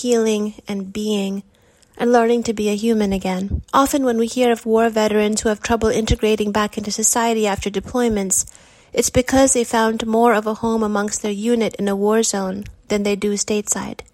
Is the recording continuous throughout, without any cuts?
no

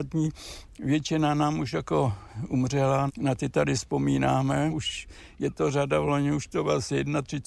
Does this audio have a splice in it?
yes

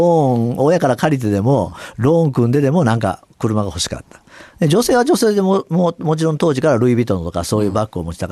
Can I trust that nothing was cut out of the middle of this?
yes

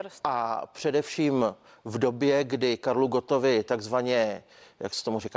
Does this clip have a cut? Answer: no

